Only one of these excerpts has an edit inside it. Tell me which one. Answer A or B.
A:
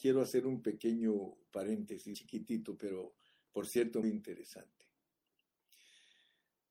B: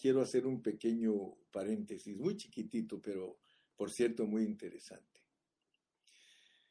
A